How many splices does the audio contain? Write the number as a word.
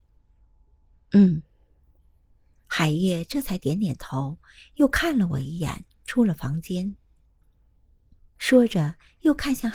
one